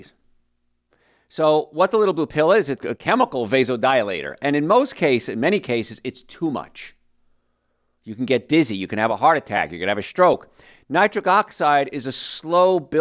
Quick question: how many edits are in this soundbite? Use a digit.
1